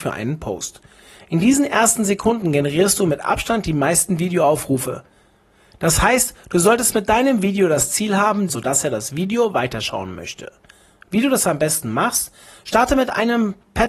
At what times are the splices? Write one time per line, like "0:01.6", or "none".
0:08.5